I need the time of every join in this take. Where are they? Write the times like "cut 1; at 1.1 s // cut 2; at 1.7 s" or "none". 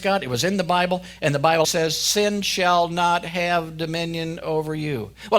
cut 1; at 1.6 s

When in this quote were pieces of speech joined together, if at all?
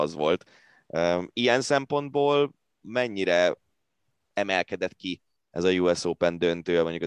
none

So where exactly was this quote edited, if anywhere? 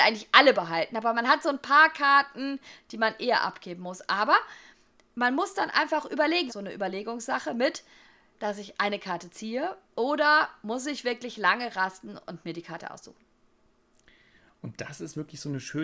cut 1; at 6.5 s // cut 2; at 8.3 s

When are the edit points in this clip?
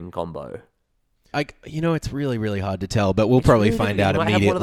cut 1; at 1.3 s

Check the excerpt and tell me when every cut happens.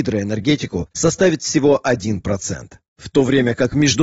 none

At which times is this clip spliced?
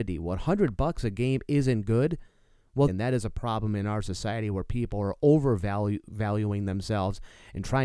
cut 1; at 2.9 s

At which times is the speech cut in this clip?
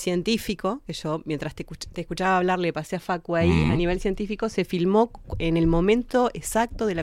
none

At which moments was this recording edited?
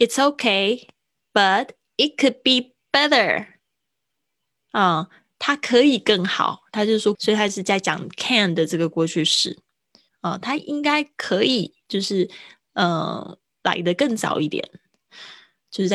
cut 1; at 7.1 s // cut 2; at 10.1 s

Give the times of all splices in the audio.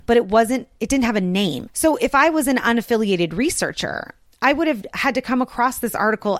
cut 1; at 1.7 s

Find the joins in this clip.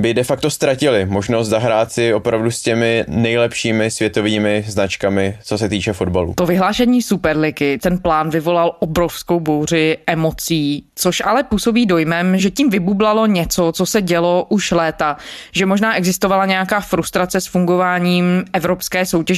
none

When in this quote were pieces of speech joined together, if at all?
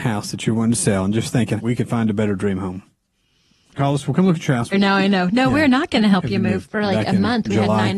cut 1; at 1.6 s // cut 2; at 4.7 s // cut 3; at 6.6 s

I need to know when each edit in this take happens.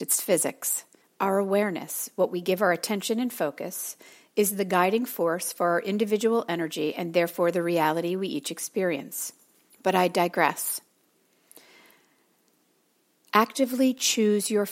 cut 1; at 1.0 s // cut 2; at 9.7 s

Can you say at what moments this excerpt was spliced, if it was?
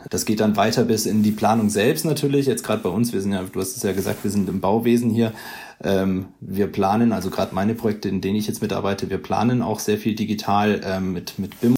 none

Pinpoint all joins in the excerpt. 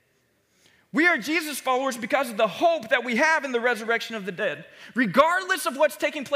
none

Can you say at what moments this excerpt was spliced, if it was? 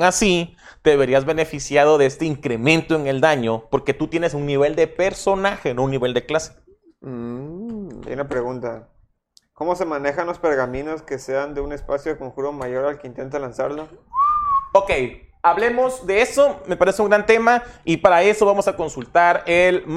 none

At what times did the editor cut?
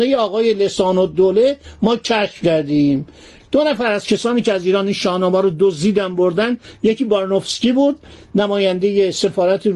none

